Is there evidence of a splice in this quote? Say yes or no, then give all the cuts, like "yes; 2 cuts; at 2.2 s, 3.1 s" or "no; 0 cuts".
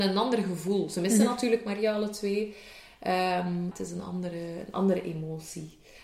yes; 1 cut; at 3.7 s